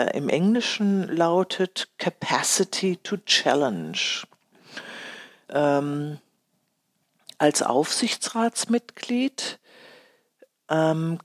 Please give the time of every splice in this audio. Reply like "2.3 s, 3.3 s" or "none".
5.5 s